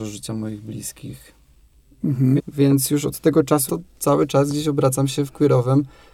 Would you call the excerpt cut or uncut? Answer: cut